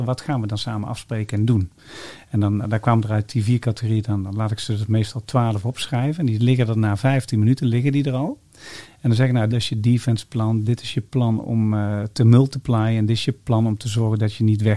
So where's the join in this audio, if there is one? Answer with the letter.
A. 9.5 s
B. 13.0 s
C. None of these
A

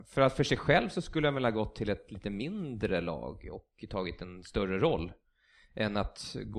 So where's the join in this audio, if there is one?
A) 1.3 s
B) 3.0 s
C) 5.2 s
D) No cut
D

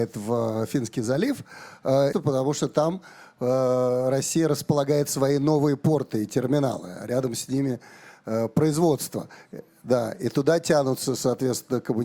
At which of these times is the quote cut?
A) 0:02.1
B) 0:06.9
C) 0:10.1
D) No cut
A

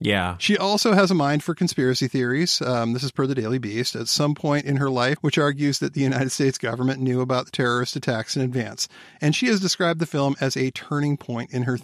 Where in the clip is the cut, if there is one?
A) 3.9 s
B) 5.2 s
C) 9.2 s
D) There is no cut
B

